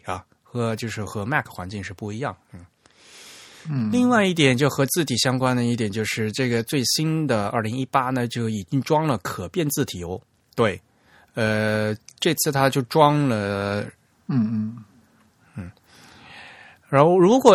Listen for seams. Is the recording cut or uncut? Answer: cut